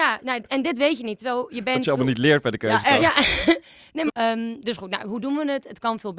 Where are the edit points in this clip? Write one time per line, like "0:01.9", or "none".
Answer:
0:04.1